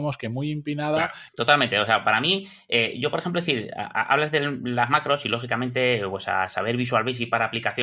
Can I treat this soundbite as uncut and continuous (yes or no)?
no